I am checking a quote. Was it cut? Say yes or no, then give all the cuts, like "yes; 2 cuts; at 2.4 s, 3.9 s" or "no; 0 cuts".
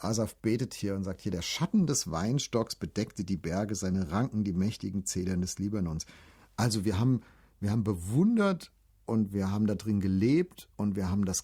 no; 0 cuts